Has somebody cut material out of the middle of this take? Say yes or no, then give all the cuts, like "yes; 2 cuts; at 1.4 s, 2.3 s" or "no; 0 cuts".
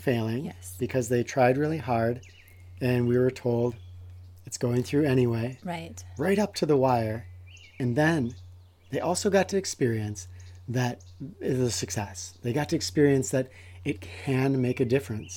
no; 0 cuts